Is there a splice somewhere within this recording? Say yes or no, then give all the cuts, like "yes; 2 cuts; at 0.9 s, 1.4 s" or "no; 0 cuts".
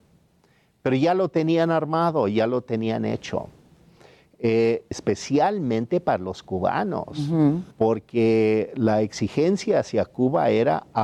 yes; 2 cuts; at 4.9 s, 7.7 s